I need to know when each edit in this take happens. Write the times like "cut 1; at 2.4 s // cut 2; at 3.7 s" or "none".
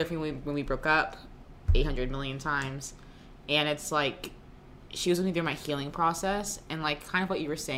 none